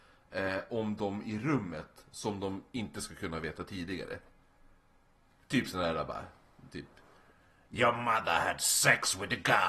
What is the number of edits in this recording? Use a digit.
0